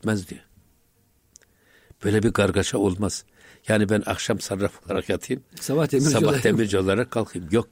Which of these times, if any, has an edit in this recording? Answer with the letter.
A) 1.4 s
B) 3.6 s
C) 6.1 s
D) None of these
D